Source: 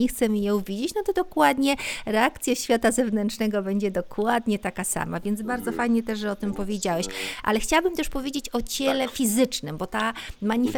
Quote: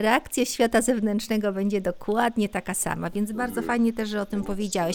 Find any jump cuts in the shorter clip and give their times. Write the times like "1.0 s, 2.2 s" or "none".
none